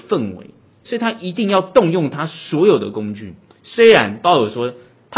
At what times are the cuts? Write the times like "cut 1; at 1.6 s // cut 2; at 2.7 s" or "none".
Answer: none